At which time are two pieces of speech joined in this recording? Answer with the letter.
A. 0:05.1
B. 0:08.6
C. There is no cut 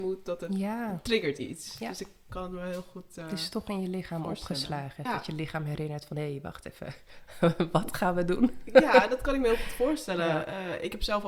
A